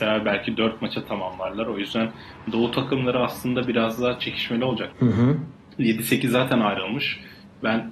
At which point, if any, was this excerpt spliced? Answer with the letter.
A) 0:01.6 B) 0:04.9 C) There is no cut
B